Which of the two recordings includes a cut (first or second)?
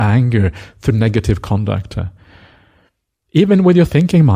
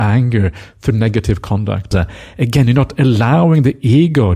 second